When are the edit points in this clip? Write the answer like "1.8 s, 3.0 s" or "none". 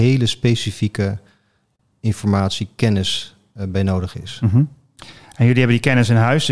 none